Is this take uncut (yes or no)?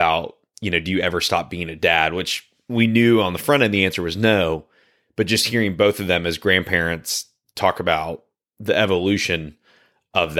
yes